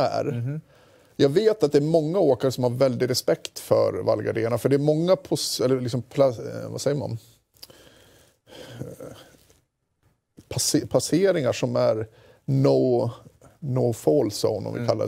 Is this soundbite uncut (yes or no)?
yes